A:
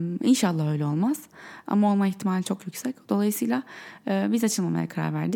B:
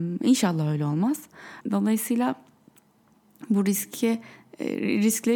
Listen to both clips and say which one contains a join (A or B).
B